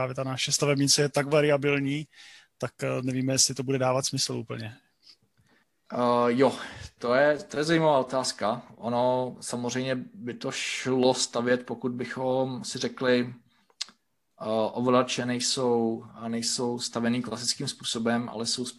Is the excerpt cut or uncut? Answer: uncut